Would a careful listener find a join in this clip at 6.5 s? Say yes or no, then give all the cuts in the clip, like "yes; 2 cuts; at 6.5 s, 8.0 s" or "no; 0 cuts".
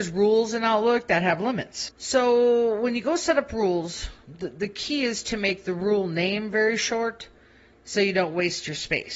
no; 1 cut; at 1.9 s